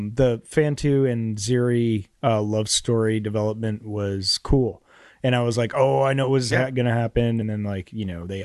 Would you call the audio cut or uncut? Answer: uncut